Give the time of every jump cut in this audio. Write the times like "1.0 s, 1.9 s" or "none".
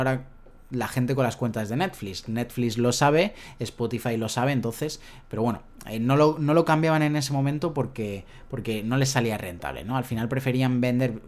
none